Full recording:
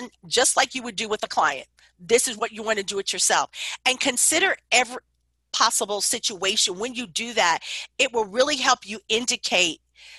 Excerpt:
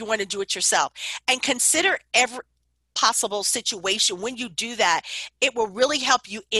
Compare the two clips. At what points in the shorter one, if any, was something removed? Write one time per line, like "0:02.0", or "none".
none